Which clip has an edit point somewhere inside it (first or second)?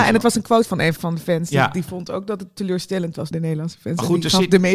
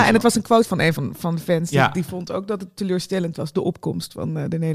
first